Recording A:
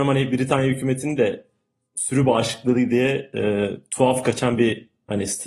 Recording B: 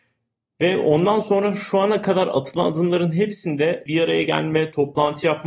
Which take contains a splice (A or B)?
B